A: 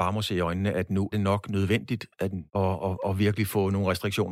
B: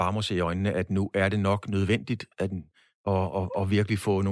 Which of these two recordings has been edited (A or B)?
A